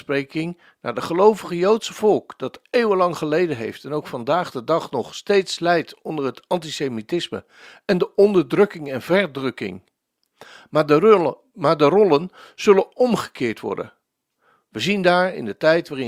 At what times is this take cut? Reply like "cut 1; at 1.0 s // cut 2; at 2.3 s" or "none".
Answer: none